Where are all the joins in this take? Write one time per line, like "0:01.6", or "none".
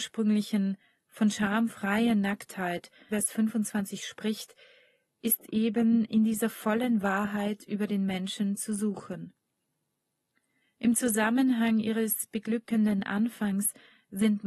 0:03.1